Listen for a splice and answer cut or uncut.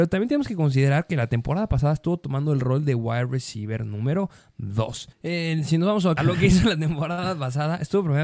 cut